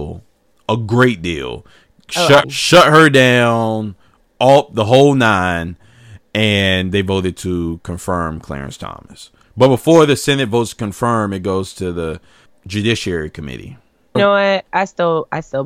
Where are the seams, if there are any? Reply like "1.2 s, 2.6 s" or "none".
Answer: 2.4 s, 9.4 s, 14.1 s